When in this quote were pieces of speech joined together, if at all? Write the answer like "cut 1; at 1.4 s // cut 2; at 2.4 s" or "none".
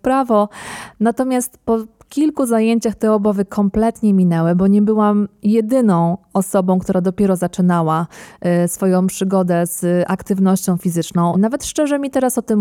cut 1; at 11.3 s